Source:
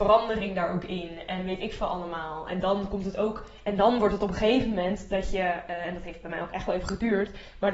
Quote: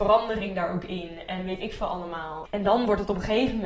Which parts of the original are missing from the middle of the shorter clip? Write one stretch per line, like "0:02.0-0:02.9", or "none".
0:02.5-0:03.6

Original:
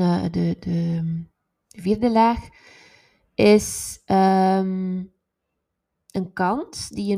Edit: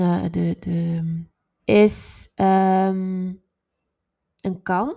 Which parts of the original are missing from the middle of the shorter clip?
0:01.6-0:03.3

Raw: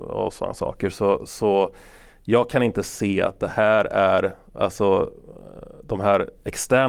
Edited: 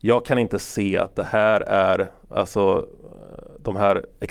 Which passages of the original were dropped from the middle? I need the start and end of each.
none

